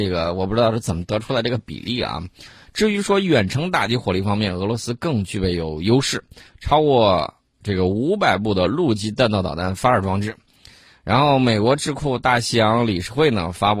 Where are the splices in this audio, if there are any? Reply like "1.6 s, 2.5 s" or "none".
none